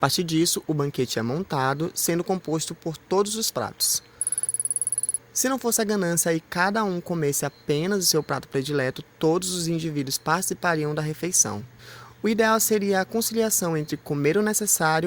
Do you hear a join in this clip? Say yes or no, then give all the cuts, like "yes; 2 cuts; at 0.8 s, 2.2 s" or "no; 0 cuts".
no; 0 cuts